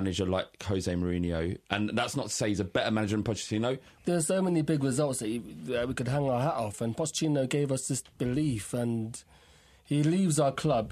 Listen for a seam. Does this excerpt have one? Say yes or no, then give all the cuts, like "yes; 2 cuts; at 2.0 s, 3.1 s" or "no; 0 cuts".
yes; 1 cut; at 4.0 s